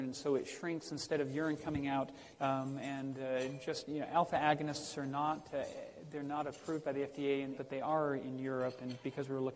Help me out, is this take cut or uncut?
cut